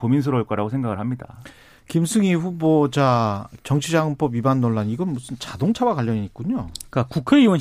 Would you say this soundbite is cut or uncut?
uncut